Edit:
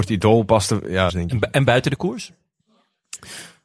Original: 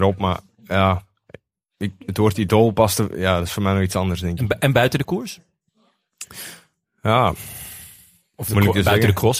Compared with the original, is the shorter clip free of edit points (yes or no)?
no